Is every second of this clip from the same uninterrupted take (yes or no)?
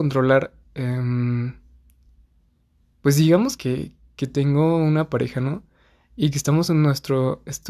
no